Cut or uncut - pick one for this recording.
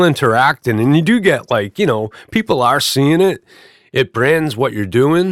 uncut